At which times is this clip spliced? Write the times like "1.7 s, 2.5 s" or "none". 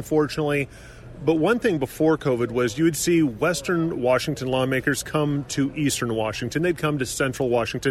none